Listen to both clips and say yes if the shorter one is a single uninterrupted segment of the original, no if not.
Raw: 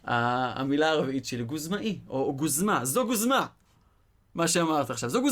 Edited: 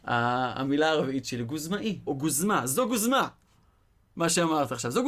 no